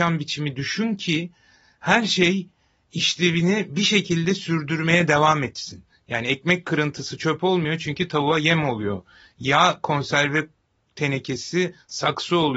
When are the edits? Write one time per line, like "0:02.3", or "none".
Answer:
none